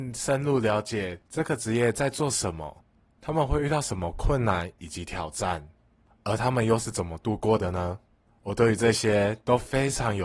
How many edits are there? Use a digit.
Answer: 0